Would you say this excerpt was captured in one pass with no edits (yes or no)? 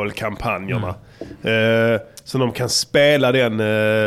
yes